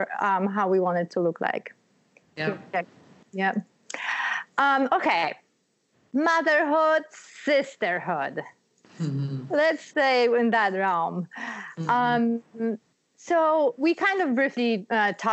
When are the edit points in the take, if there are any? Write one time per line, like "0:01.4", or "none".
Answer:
none